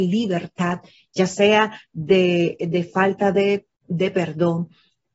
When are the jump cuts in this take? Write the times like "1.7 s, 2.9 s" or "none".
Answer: 3.8 s